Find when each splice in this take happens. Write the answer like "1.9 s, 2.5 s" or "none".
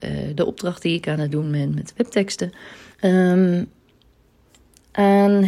2.9 s